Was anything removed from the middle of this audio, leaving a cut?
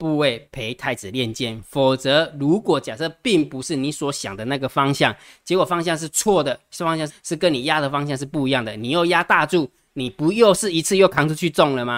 yes; 1 cut; at 7.1 s

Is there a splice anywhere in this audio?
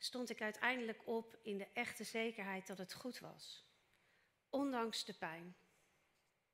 no; 0 cuts

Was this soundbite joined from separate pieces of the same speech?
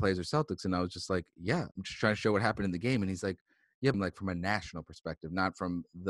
yes; 2 cuts; at 1.7 s, 3.9 s

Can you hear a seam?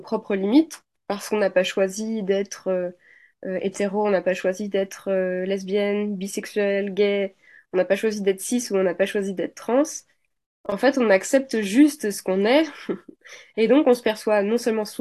no; 0 cuts

